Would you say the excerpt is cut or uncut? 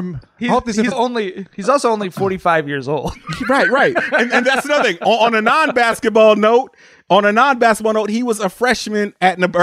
cut